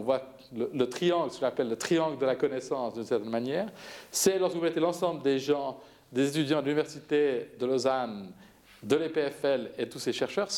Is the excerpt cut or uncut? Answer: uncut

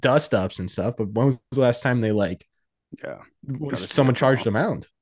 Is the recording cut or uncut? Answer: uncut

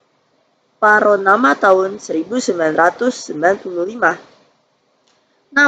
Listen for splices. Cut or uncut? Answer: uncut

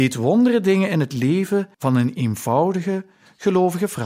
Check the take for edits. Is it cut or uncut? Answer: cut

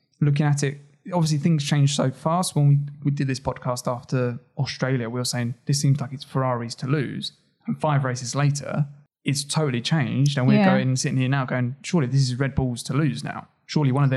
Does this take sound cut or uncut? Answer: uncut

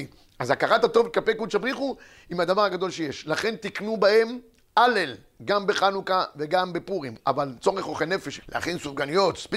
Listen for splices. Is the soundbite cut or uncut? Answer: cut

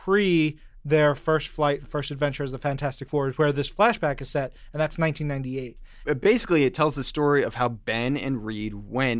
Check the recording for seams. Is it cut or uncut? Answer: uncut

